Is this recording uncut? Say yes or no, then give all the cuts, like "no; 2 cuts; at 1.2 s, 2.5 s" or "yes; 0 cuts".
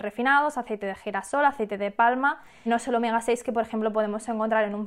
no; 1 cut; at 2.7 s